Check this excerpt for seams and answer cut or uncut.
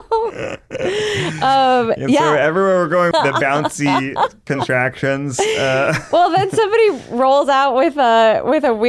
cut